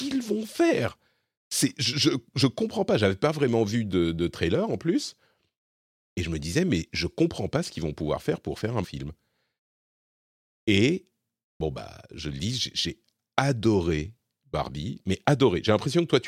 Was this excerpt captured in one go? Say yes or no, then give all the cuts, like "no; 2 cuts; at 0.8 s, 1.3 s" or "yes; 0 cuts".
no; 1 cut; at 8.8 s